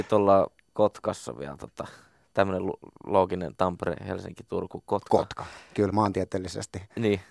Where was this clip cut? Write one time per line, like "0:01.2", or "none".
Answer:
none